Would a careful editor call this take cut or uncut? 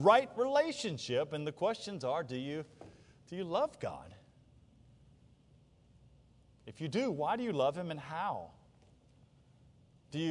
uncut